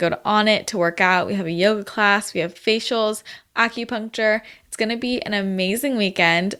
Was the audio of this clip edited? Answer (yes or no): no